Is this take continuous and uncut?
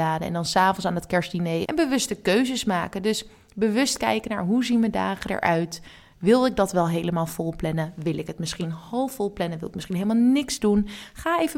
no; 1 cut; at 1.6 s

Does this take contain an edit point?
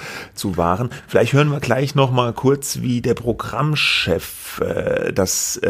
no; 0 cuts

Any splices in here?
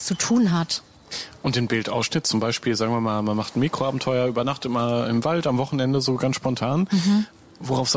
no; 0 cuts

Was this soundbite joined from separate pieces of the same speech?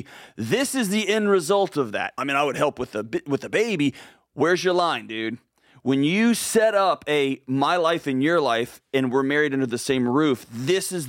yes; 1 cut; at 2.2 s

